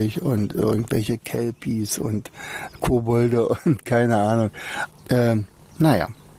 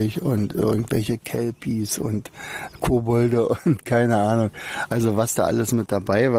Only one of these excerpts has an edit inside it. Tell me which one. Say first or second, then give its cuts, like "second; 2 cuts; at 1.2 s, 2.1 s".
first; 1 cut; at 4.9 s